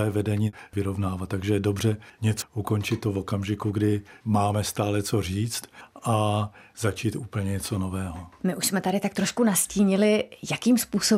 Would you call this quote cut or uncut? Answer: cut